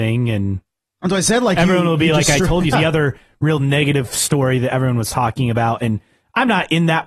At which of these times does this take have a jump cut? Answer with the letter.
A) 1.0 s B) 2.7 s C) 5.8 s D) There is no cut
B